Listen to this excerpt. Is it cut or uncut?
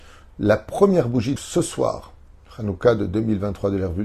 cut